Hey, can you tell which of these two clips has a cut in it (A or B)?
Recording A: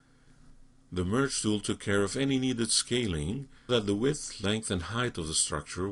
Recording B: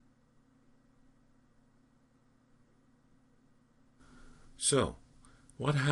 A